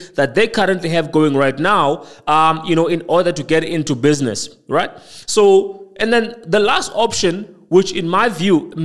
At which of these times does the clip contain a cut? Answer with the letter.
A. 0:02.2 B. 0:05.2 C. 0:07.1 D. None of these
D